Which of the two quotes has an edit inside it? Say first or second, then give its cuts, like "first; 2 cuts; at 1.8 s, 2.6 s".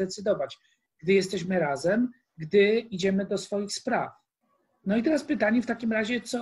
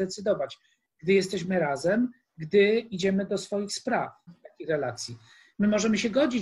second; 1 cut; at 4.3 s